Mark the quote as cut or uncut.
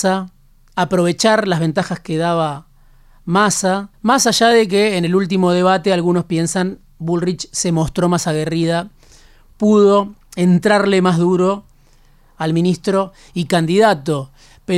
cut